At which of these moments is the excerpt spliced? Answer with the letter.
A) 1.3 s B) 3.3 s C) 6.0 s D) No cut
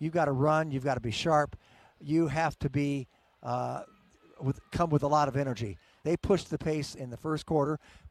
C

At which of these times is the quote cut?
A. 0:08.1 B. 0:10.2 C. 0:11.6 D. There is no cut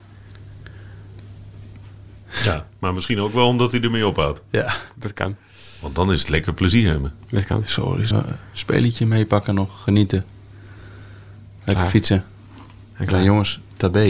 A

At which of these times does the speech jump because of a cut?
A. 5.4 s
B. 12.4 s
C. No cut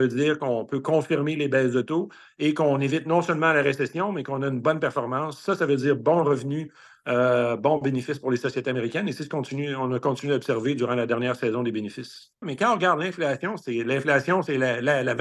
B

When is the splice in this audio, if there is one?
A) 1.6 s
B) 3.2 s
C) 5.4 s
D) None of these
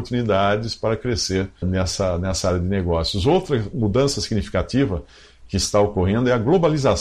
A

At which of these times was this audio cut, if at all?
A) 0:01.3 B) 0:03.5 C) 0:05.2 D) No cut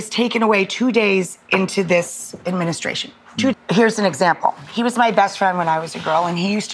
B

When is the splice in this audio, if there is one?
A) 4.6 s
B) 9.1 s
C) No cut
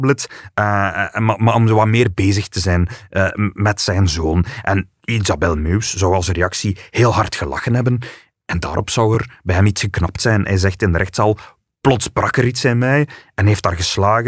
C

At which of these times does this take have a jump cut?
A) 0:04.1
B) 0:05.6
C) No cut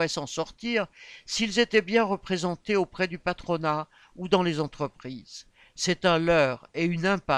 C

